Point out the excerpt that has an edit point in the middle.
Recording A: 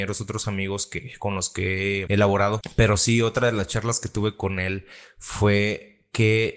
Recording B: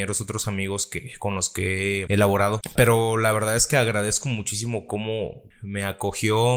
B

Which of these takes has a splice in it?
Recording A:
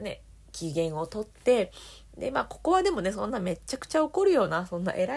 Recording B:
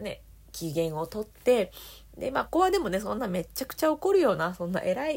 B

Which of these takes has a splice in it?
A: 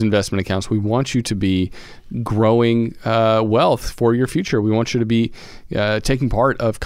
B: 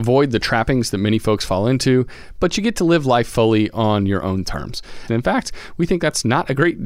B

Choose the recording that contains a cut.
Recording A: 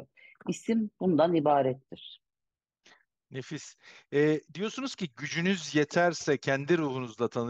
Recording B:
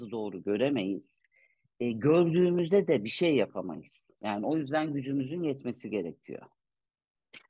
B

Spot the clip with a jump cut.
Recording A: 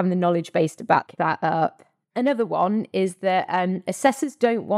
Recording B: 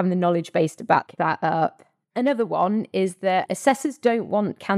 B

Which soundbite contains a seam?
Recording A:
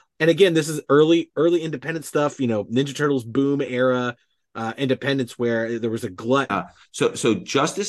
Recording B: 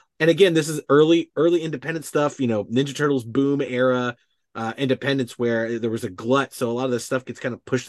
A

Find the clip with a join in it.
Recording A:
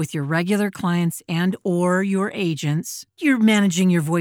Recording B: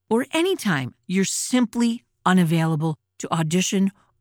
A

